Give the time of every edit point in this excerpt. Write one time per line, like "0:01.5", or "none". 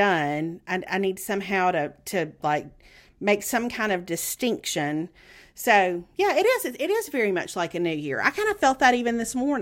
none